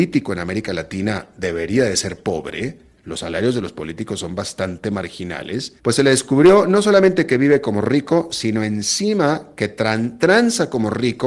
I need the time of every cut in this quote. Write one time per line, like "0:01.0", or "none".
0:05.8